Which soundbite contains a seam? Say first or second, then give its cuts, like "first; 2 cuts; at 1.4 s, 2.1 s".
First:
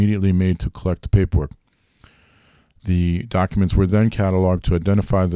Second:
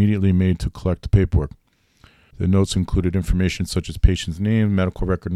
second; 1 cut; at 2.3 s